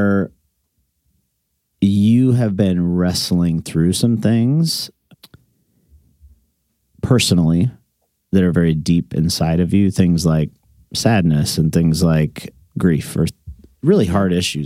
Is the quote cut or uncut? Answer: uncut